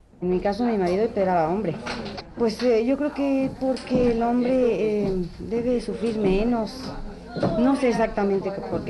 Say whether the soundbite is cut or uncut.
uncut